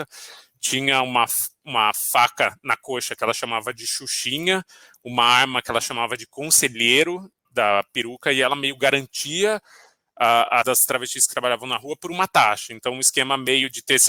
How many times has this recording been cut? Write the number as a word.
two